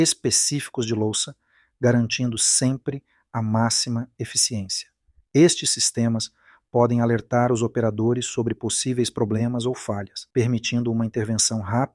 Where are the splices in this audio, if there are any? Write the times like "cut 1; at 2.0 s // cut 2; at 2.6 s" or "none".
cut 1; at 5.2 s // cut 2; at 10.3 s